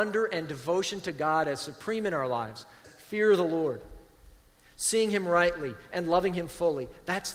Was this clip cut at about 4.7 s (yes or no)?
no